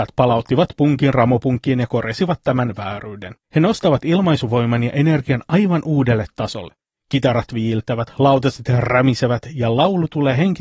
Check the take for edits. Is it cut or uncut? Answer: cut